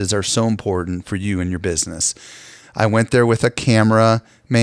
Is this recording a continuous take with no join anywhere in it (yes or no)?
no